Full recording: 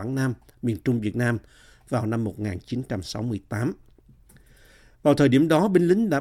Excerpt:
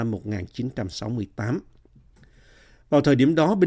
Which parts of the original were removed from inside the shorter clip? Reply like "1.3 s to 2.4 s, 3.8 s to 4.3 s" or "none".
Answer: none